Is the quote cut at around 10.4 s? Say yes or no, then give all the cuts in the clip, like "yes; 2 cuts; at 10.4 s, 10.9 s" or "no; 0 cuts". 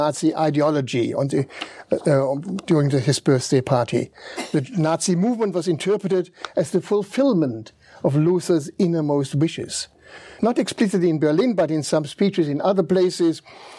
yes; 1 cut; at 10.4 s